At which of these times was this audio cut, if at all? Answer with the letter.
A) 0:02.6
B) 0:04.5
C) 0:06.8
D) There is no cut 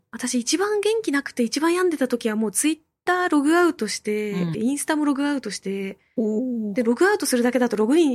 B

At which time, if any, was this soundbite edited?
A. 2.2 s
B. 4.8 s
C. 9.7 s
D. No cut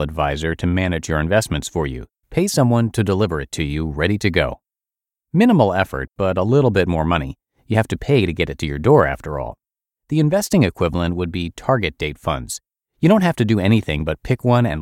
A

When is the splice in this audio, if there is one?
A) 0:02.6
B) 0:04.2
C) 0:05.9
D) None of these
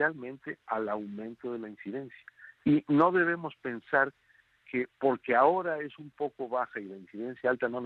A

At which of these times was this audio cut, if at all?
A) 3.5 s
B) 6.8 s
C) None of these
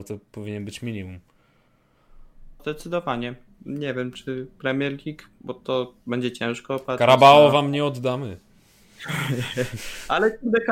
A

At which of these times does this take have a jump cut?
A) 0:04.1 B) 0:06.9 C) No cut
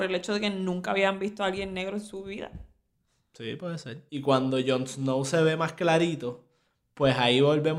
A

